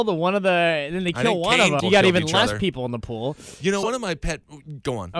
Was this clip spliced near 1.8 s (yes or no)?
yes